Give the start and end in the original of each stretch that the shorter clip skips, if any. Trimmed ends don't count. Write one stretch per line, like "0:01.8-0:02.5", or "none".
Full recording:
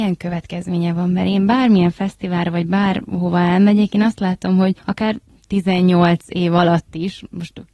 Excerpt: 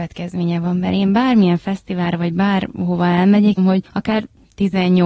0:03.9-0:04.5